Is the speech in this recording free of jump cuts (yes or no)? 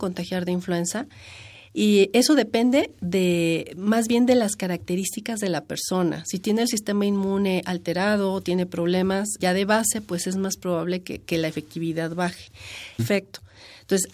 no